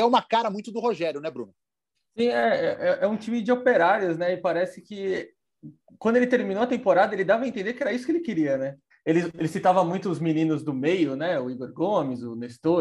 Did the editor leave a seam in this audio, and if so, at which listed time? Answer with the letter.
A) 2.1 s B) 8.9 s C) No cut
B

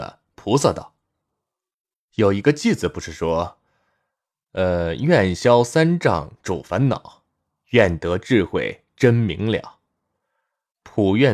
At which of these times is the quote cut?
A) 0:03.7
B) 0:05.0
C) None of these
C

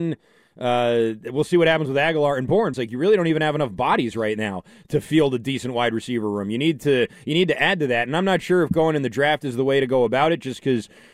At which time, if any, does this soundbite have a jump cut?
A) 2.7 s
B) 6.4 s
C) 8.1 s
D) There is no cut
A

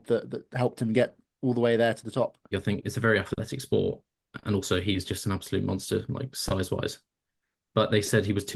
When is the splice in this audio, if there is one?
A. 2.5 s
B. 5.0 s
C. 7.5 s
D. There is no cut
A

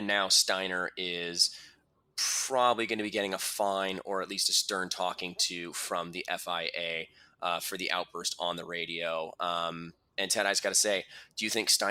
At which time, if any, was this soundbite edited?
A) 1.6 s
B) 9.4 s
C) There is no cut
C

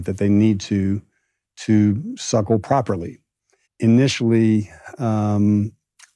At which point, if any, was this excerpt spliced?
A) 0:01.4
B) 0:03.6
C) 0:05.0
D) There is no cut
B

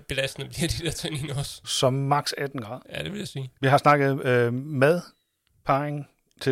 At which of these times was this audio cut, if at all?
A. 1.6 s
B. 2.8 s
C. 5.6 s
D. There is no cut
B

